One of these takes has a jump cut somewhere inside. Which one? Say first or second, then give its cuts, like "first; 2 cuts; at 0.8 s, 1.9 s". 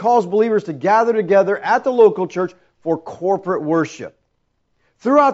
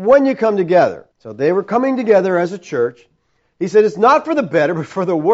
second; 1 cut; at 1.1 s